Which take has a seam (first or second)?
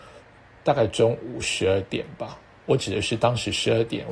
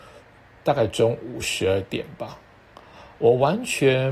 first